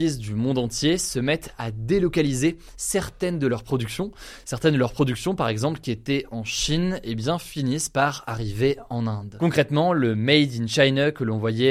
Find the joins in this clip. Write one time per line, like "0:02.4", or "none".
none